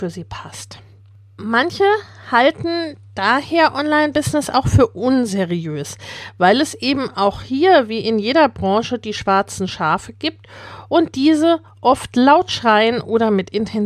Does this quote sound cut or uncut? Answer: uncut